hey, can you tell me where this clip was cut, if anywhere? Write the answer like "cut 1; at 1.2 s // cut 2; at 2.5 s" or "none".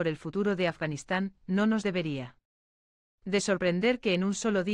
none